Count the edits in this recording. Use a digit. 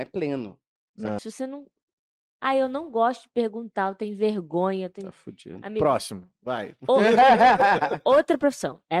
1